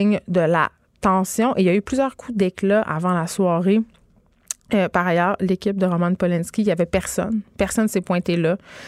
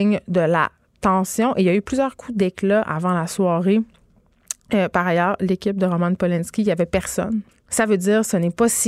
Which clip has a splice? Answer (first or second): second